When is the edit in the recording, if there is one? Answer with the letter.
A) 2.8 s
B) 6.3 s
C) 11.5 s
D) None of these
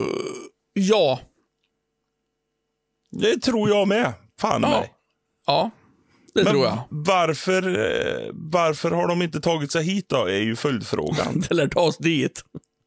C